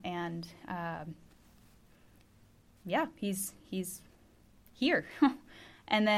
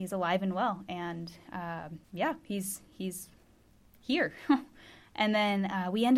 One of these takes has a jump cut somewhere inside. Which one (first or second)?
second